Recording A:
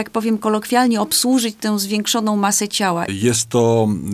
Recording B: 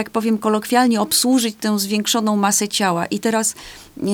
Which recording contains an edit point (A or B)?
A